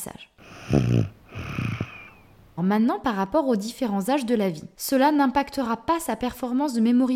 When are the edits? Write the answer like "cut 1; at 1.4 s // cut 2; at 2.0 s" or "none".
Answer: cut 1; at 2.6 s // cut 2; at 4.7 s